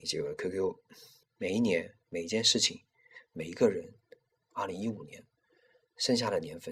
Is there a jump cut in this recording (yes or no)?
yes